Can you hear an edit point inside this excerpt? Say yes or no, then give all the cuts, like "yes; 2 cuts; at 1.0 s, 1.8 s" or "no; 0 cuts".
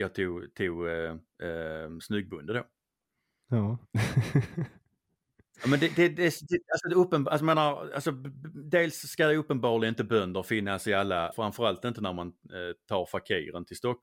yes; 1 cut; at 11.3 s